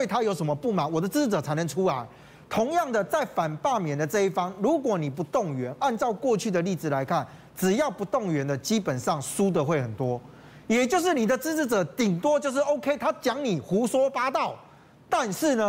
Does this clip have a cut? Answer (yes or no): no